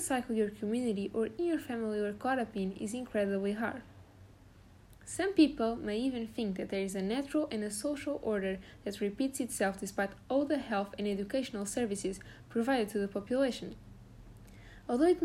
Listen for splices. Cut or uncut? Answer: cut